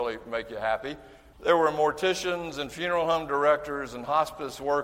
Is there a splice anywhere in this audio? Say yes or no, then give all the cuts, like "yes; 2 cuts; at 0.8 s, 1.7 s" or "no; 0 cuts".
yes; 1 cut; at 1.3 s